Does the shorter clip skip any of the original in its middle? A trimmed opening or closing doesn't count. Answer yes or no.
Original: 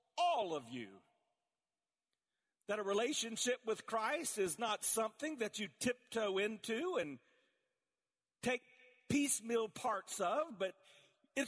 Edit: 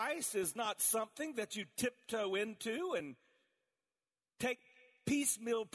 no